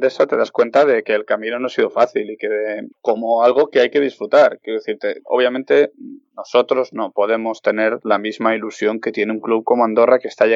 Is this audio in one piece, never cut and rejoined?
no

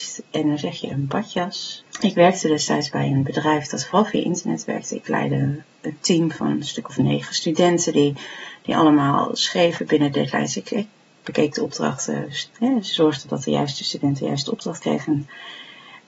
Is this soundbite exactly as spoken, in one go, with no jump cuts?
no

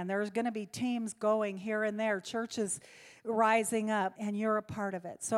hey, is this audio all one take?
no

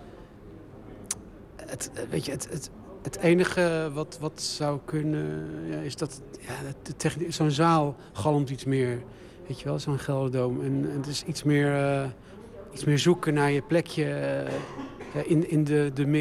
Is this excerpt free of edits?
yes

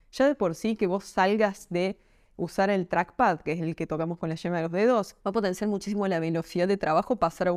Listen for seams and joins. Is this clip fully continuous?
no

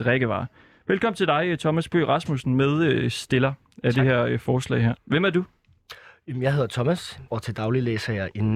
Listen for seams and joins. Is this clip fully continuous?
no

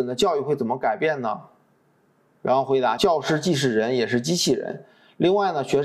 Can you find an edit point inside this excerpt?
yes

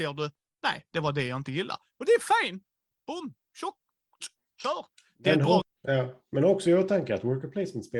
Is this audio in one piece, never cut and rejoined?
no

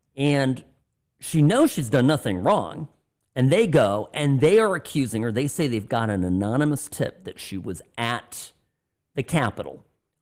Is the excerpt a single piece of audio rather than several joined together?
yes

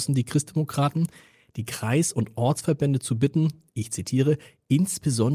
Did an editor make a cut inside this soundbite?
no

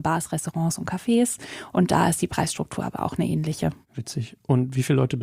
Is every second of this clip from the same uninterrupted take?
yes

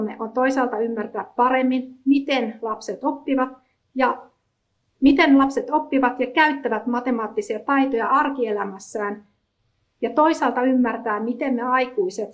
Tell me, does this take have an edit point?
no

